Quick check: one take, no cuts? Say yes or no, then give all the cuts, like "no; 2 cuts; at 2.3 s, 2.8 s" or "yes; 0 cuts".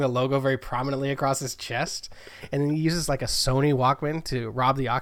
yes; 0 cuts